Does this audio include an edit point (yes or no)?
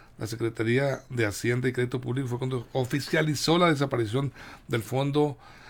no